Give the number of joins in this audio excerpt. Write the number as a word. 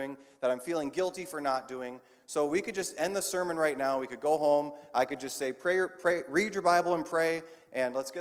zero